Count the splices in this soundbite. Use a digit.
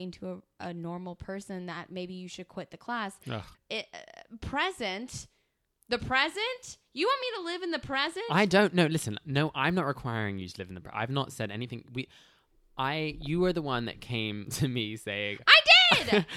1